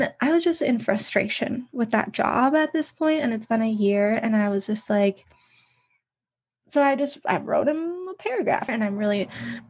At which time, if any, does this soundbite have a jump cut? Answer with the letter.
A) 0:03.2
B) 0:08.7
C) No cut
B